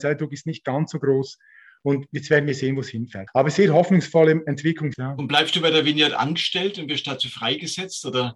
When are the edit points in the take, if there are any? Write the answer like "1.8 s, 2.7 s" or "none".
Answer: 3.3 s, 4.9 s